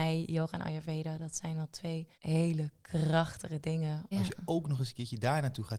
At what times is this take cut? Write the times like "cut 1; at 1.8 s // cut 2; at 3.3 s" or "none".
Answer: cut 1; at 2.1 s // cut 2; at 4.1 s